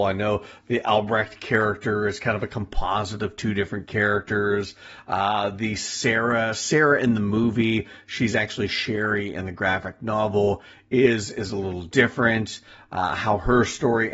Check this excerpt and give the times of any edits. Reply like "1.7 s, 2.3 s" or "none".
none